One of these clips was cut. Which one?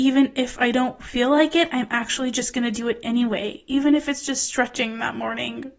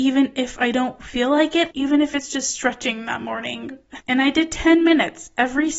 second; 2 cuts; at 1.7 s, 4.0 s

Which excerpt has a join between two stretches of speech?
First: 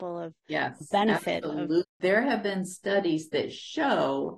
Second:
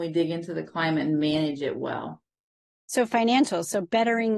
first; 1 cut; at 1.8 s

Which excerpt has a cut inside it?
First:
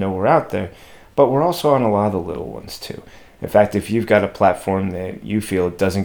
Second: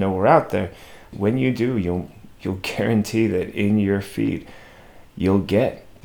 second; 1 cut; at 1.1 s

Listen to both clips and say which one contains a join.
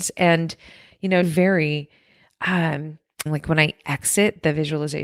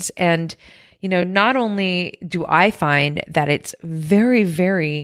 first; 2 cuts; at 1.2 s, 3.3 s

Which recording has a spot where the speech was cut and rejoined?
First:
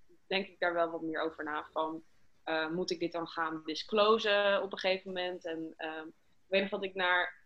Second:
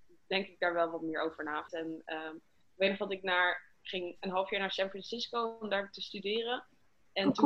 second; 1 cut; at 1.7 s

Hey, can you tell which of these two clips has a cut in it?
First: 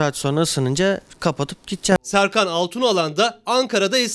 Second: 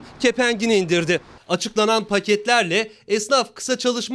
second; 1 cut; at 1.4 s

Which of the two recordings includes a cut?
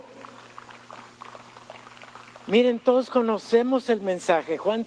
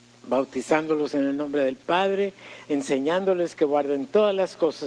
second; 1 cut; at 2.7 s

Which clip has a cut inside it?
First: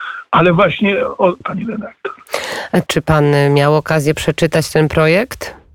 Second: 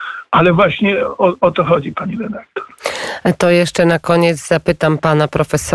first; 2 cuts; at 1.4 s, 2.9 s

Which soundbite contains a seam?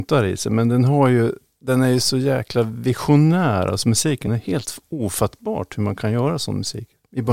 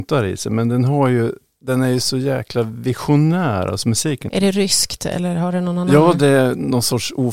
second; 1 cut; at 4.3 s

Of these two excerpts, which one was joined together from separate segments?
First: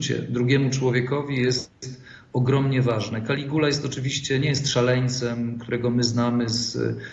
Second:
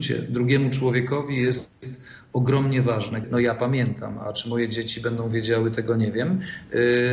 second; 1 cut; at 3.2 s

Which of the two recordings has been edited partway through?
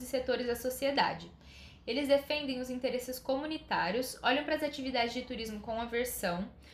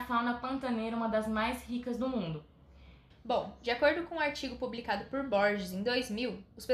second; 1 cut; at 3.1 s

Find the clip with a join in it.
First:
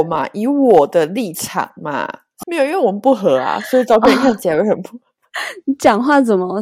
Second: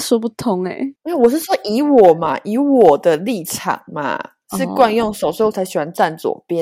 first; 1 cut; at 2.4 s

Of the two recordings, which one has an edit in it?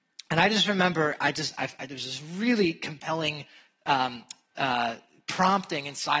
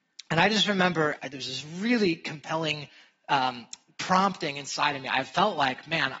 second; 2 cuts; at 1.2 s, 3.9 s

